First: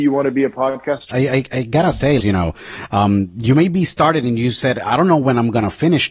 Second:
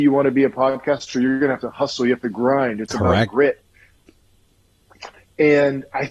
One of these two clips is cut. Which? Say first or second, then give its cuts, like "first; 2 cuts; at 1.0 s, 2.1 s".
first; 2 cuts; at 1.1 s, 2.2 s